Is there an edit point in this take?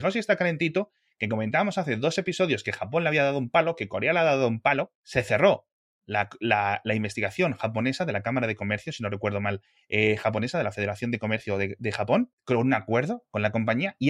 no; 0 cuts

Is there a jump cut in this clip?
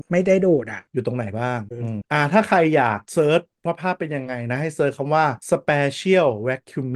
yes; 1 cut; at 1.7 s

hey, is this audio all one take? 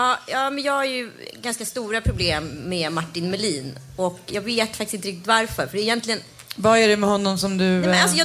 no; 1 cut; at 4.3 s

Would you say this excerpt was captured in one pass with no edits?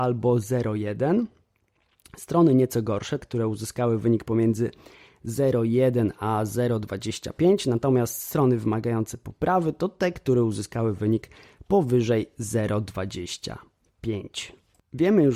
no; 1 cut; at 3.2 s

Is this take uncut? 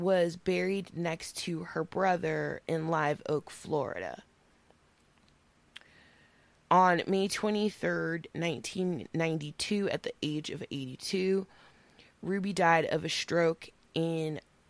no; 1 cut; at 6.6 s

